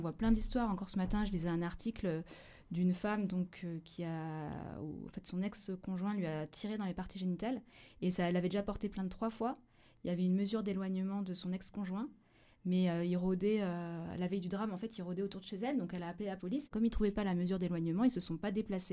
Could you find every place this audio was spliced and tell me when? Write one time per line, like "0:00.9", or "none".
none